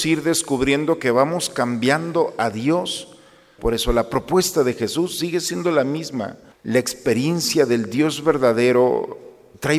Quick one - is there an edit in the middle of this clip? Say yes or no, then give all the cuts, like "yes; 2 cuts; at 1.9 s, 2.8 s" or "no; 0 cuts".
yes; 2 cuts; at 3.6 s, 6.5 s